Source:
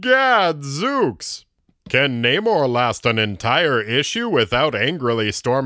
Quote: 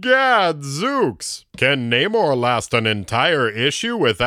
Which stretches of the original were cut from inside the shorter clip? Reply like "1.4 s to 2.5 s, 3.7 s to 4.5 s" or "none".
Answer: 1.5 s to 1.8 s